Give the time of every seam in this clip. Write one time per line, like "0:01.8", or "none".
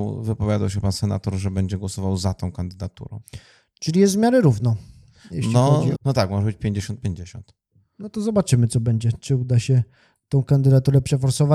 0:06.0

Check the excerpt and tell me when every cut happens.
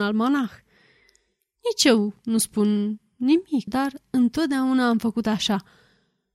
0:03.7

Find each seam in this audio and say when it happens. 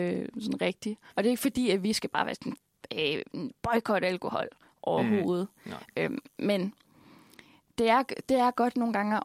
0:01.1

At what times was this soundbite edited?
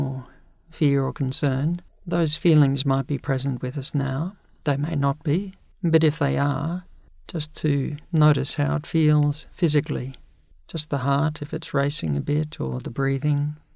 0:07.1

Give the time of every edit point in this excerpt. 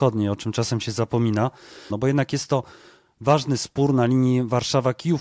0:01.9

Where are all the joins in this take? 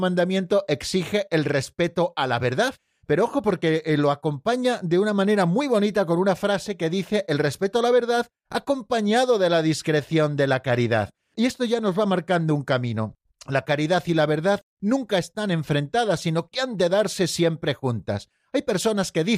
none

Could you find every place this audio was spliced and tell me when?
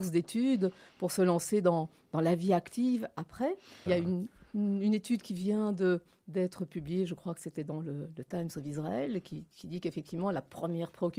0:03.9

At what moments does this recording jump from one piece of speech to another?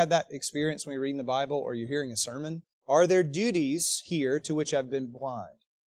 0:02.7

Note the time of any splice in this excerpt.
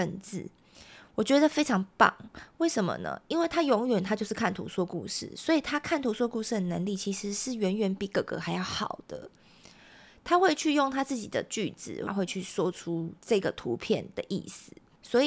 0:12.1
0:13.2

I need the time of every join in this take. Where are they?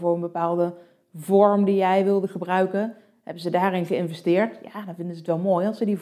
none

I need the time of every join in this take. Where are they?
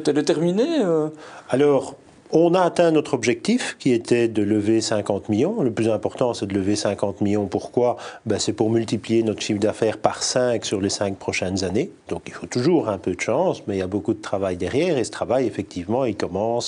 0:12.1

